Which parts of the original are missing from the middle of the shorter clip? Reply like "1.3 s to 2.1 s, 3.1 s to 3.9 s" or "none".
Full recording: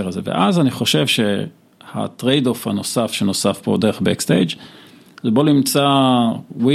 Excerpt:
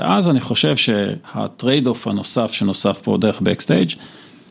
1.5 s to 1.8 s

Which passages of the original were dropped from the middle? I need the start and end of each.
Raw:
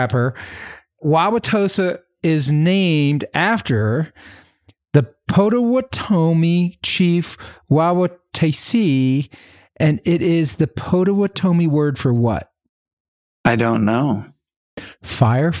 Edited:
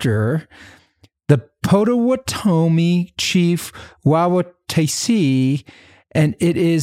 none

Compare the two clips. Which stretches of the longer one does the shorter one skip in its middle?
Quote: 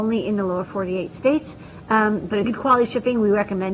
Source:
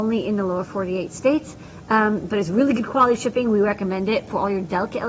2.4 s to 2.7 s

